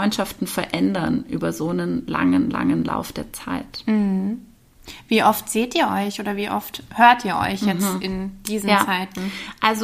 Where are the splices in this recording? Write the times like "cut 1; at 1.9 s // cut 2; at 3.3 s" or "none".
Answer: none